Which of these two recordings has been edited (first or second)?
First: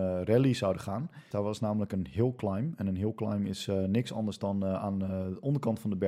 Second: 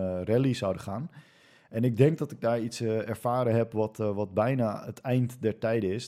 first